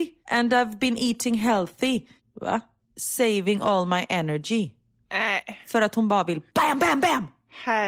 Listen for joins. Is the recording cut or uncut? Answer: cut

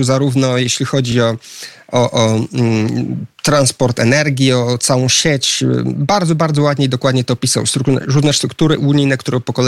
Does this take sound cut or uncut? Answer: uncut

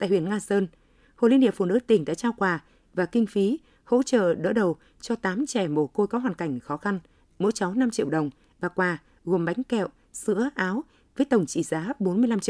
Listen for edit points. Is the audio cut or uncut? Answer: uncut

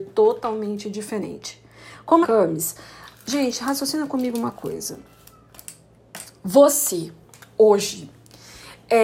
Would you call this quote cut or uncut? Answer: cut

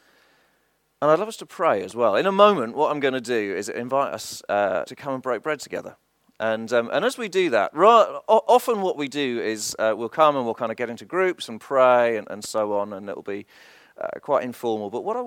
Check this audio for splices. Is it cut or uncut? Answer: cut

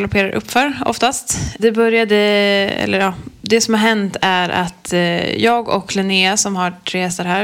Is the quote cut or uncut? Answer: cut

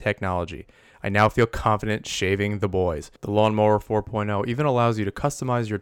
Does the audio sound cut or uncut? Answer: cut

